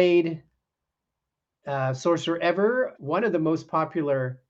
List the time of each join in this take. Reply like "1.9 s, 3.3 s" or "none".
3.0 s